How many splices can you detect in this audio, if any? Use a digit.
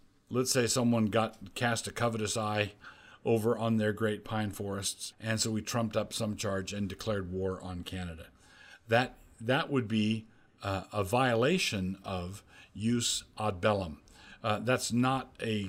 1